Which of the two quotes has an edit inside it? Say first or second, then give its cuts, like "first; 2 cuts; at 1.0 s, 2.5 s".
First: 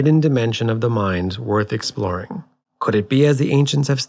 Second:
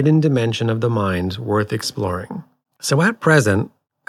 second; 1 cut; at 2.7 s